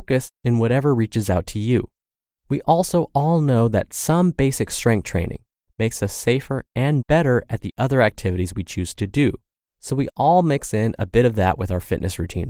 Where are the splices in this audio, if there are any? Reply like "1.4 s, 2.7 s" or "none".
5.7 s